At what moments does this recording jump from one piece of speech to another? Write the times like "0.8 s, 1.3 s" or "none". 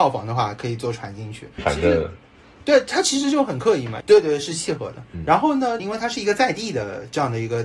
1.6 s, 4.0 s, 5.8 s